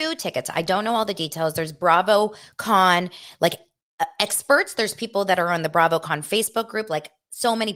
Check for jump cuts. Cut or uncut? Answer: uncut